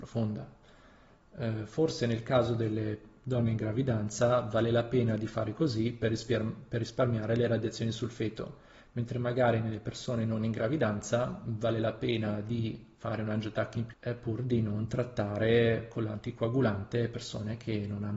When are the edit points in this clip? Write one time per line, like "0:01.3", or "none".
0:13.9